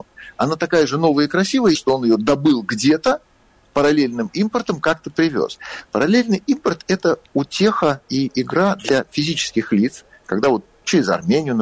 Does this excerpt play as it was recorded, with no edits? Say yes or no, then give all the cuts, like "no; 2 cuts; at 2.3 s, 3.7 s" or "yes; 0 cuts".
no; 1 cut; at 1.7 s